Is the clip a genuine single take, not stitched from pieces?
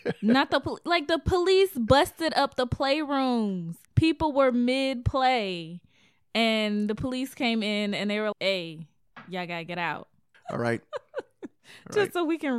no; 3 cuts; at 3.8 s, 8.3 s, 10.3 s

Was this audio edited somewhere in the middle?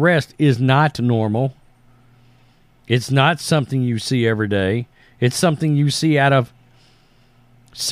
no; 0 cuts

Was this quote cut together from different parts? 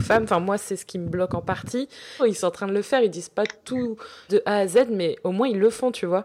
yes; 2 cuts; at 2.2 s, 4.3 s

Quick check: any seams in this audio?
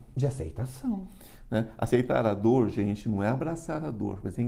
no; 0 cuts

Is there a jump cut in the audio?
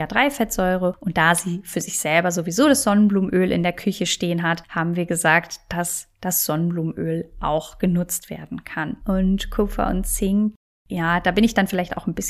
yes; 1 cut; at 9.0 s

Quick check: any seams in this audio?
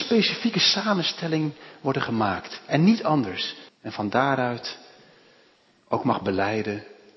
yes; 1 cut; at 3.7 s

